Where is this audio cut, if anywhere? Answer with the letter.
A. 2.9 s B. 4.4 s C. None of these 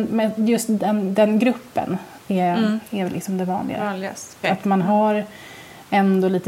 B